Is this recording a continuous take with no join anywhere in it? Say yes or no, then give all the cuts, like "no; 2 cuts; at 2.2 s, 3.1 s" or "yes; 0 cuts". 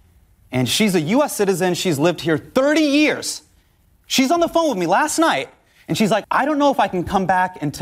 no; 1 cut; at 6.2 s